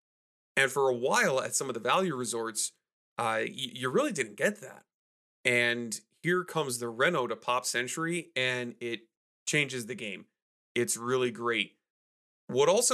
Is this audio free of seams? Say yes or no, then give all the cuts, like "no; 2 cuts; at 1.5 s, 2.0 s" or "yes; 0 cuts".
yes; 0 cuts